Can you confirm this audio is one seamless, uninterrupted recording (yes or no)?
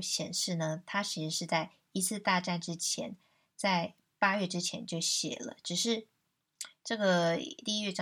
yes